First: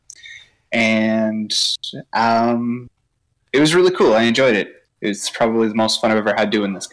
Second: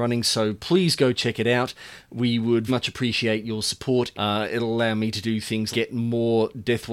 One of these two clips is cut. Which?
second; 3 cuts; at 2.7 s, 4.1 s, 5.7 s

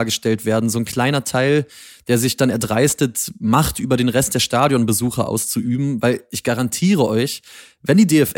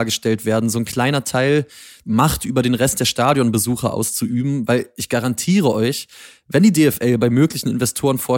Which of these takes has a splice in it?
second; 1 cut; at 2.0 s

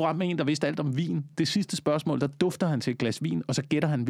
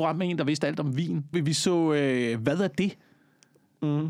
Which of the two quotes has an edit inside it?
second; 1 cut; at 1.3 s

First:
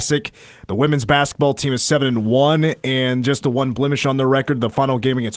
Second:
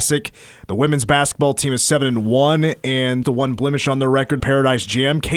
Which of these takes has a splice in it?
second; 2 cuts; at 3.2 s, 4.4 s

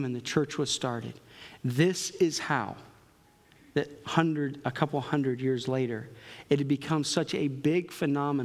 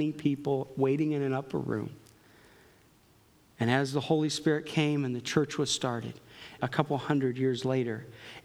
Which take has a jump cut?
second; 1 cut; at 6.6 s

